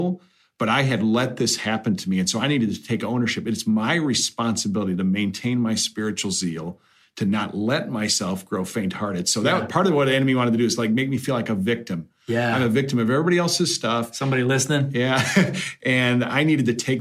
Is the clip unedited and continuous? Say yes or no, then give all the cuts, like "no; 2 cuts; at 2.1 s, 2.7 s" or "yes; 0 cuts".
yes; 0 cuts